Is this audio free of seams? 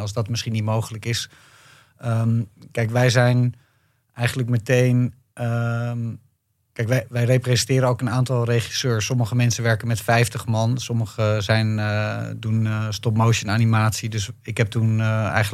yes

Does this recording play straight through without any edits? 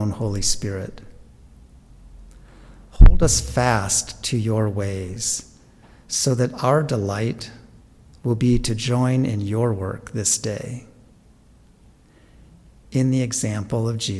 yes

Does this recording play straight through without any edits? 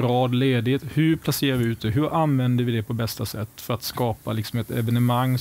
yes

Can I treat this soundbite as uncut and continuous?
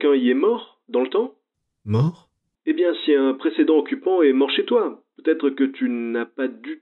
yes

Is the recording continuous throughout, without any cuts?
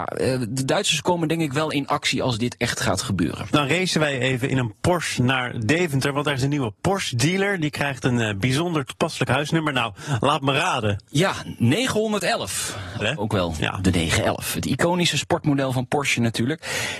no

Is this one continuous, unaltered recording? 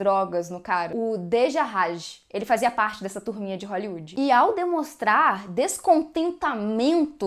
yes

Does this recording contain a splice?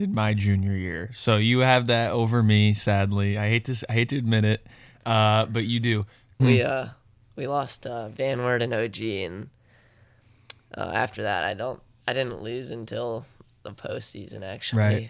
yes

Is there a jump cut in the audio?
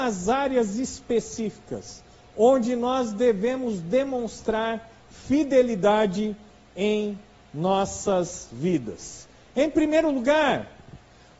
no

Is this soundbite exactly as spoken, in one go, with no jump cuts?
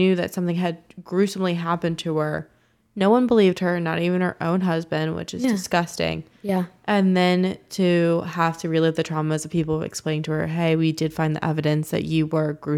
yes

